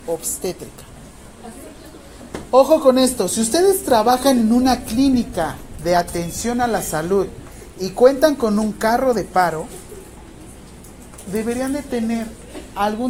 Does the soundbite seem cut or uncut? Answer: cut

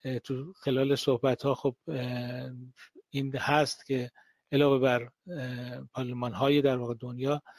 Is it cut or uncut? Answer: cut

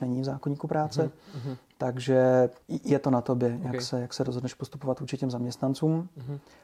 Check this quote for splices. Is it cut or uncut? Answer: cut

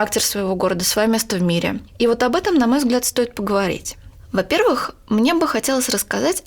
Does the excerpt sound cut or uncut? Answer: uncut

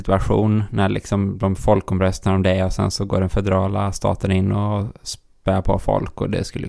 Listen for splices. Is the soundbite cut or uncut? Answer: uncut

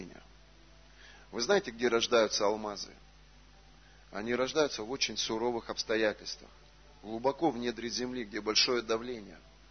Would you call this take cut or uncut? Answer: uncut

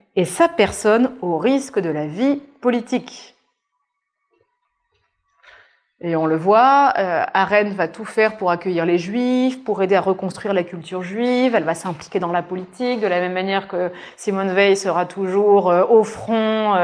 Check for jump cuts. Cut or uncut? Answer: uncut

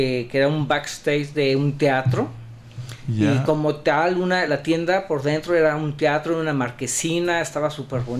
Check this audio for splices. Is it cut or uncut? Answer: uncut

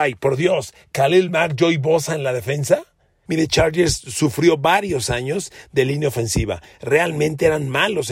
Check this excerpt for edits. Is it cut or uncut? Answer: cut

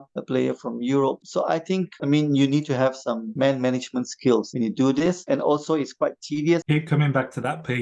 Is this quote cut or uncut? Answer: cut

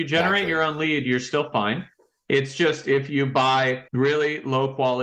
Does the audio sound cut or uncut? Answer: cut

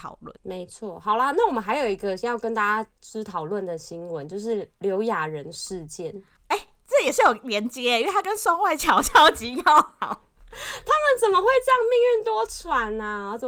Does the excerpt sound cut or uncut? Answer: uncut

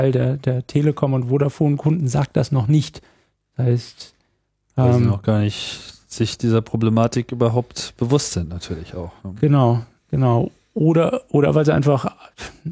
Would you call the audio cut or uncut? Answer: uncut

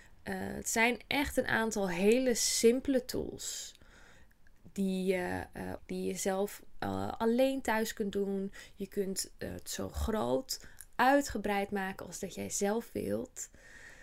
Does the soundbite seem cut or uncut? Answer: cut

